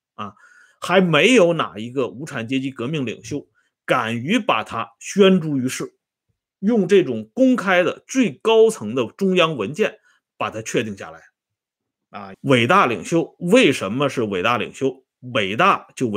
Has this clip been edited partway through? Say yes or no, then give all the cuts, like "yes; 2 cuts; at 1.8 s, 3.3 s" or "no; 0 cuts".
yes; 1 cut; at 12.3 s